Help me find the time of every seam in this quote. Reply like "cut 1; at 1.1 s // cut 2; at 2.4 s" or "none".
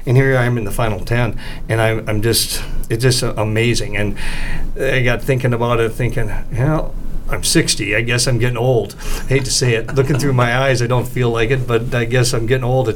none